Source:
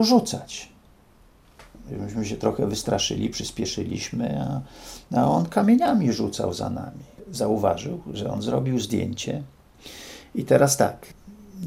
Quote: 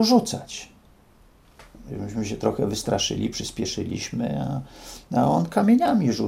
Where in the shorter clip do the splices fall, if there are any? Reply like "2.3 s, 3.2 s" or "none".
none